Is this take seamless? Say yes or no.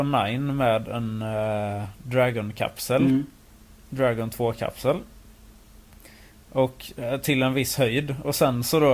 yes